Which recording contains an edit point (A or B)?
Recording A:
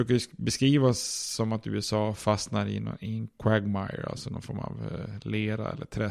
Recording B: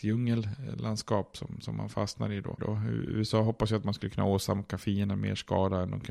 B